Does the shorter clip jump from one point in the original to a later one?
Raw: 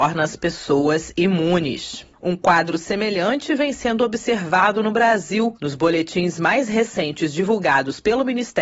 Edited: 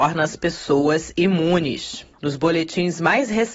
yes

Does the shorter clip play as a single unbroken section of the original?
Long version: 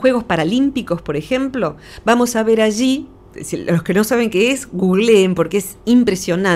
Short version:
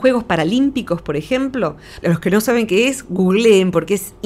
no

